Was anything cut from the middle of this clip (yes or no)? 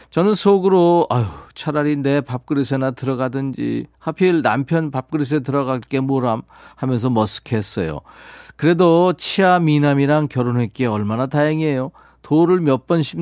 no